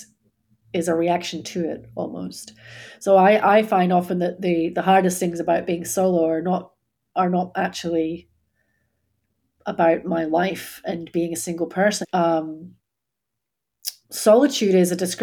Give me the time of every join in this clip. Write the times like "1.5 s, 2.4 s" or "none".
12.0 s, 14.0 s